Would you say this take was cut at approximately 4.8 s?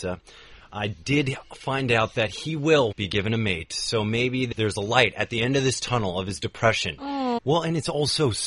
no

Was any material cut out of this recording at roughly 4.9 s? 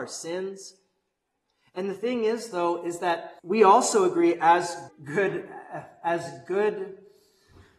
yes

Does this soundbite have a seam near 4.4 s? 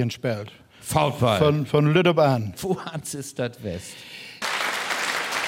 yes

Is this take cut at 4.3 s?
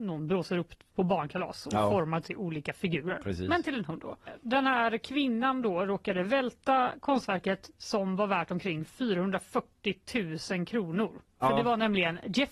yes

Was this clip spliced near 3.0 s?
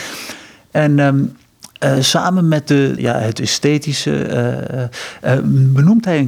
yes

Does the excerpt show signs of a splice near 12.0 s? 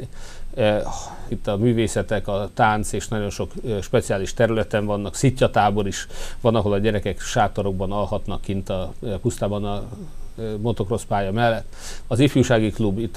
yes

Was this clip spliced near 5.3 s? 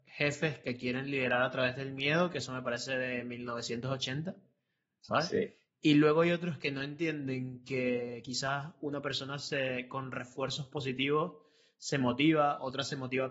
no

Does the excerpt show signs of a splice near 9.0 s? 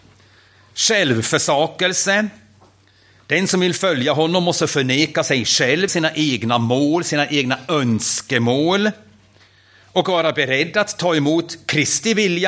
no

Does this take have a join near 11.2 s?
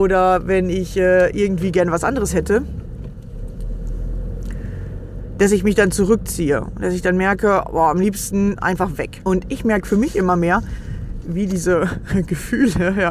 yes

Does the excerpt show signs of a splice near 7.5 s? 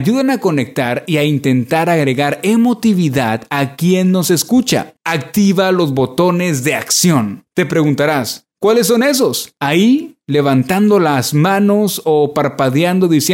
no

